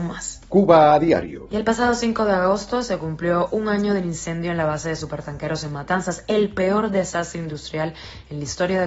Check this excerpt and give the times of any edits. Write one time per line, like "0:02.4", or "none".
none